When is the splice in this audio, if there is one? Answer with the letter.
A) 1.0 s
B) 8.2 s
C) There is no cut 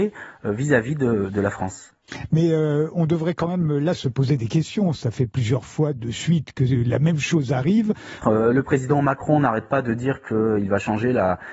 B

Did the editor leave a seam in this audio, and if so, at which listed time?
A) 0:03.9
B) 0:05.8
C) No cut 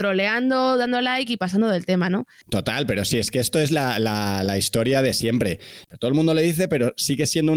B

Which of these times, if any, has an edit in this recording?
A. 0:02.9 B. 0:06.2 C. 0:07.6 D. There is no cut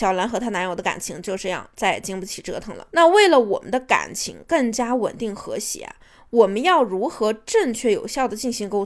D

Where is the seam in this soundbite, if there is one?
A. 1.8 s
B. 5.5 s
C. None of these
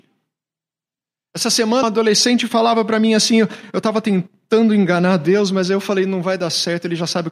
A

